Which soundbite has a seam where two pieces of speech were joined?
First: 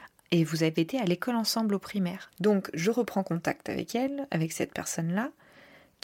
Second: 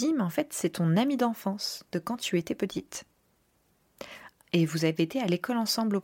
first; 1 cut; at 2.3 s

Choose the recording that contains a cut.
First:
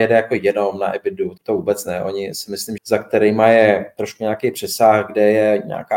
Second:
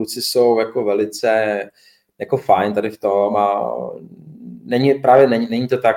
first; 2 cuts; at 1.4 s, 2.8 s

